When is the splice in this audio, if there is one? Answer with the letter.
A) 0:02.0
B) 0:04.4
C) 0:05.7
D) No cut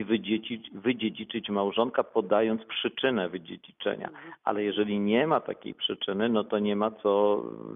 D